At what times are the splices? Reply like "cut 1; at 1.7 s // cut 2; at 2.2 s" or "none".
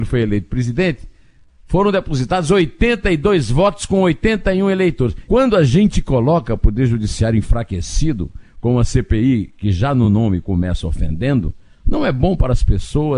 cut 1; at 5.3 s